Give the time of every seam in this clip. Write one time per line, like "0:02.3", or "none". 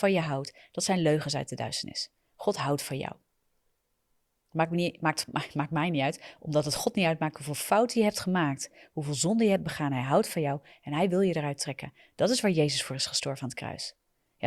none